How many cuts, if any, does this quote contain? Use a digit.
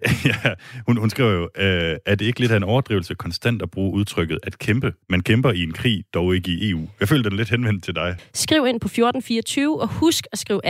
2